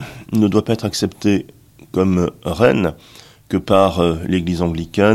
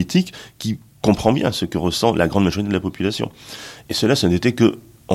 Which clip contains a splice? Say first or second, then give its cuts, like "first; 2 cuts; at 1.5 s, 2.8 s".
second; 1 cut; at 3.8 s